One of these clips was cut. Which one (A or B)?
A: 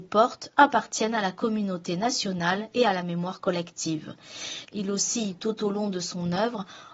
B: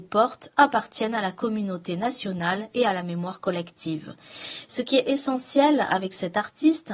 A